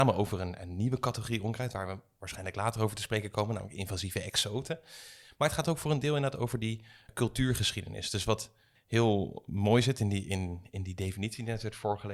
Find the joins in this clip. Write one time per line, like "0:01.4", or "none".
none